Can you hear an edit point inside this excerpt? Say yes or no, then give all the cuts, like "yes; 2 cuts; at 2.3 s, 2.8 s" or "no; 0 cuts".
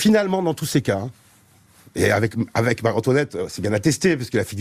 no; 0 cuts